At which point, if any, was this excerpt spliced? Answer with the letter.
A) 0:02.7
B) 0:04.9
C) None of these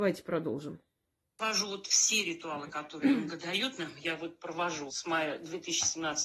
B